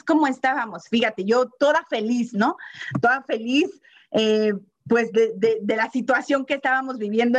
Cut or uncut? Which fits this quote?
uncut